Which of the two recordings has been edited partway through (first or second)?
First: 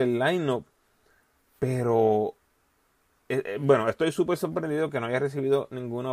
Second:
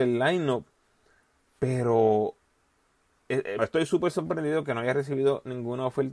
second